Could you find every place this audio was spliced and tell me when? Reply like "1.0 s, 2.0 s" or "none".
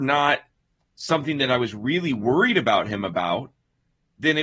none